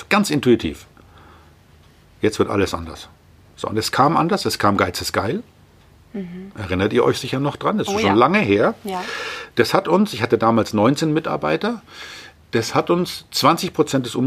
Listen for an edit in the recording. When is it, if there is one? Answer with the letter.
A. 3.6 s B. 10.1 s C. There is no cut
C